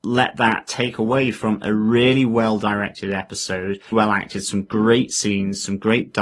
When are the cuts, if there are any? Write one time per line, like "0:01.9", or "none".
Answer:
0:03.9